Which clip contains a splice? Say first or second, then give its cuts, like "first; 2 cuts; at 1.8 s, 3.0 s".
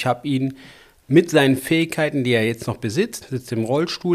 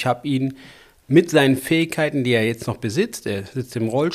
first; 1 cut; at 3.2 s